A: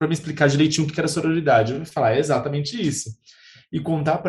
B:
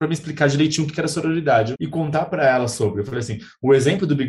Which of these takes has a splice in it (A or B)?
B